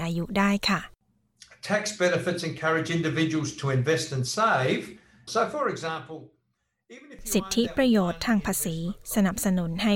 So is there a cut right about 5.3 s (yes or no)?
yes